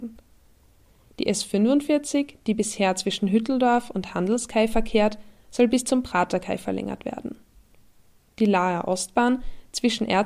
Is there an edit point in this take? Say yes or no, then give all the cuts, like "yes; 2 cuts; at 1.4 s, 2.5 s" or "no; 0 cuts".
no; 0 cuts